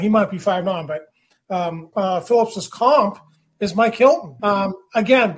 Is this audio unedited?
no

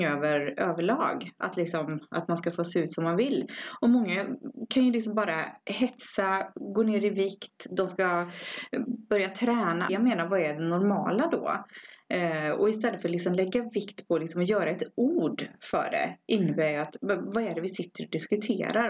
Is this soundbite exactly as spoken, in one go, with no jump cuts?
no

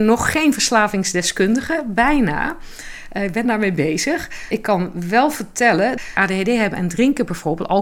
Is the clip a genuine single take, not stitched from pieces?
yes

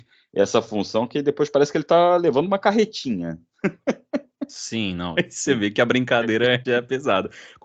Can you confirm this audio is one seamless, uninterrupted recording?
no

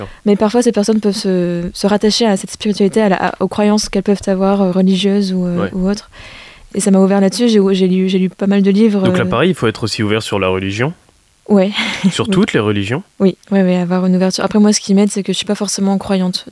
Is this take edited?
yes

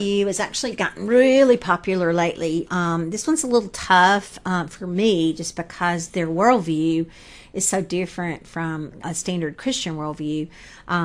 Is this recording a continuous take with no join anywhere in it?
no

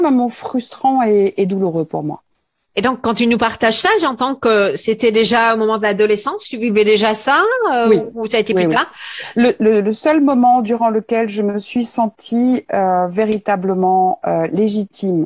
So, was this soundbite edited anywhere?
no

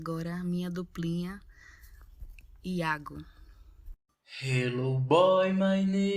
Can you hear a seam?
no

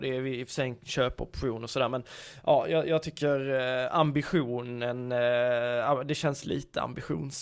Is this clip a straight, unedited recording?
yes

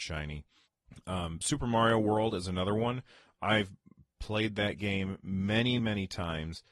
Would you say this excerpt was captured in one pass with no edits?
no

